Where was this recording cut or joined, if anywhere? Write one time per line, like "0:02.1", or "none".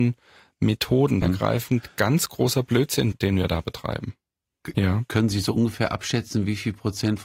0:01.2
0:03.1
0:04.7